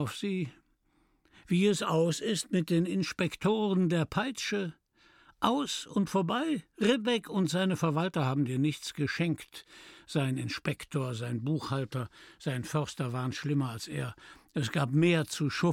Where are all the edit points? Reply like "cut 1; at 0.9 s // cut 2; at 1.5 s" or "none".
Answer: none